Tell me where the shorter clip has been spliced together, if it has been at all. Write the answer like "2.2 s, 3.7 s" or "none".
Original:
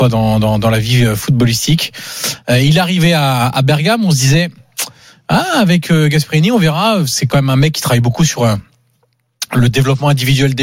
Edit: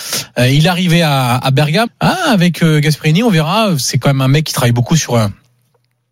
1.9 s